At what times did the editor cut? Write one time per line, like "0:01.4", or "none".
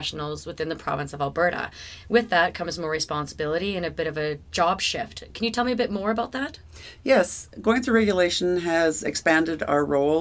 none